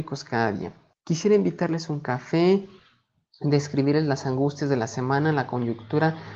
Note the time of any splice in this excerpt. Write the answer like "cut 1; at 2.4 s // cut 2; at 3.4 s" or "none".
cut 1; at 0.9 s